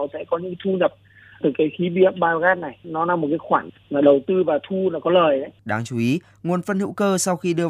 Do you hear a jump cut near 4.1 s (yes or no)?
no